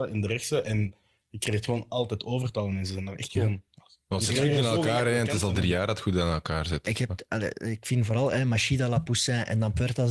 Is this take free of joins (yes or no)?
yes